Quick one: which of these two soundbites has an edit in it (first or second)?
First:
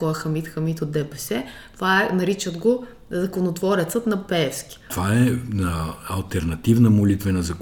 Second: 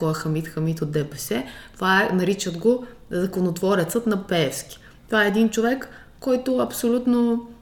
first